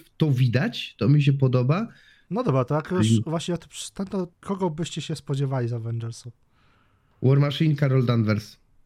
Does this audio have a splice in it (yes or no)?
yes